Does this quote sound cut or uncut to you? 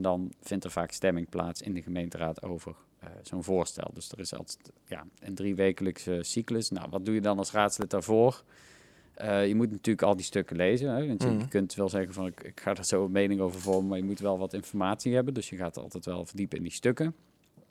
uncut